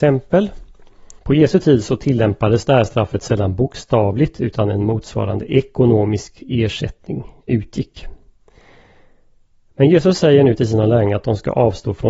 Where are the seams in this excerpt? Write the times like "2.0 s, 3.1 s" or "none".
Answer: 1.2 s